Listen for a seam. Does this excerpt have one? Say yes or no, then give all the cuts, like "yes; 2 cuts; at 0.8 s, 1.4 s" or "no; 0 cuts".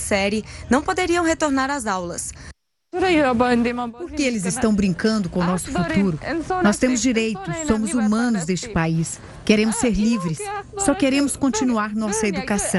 no; 0 cuts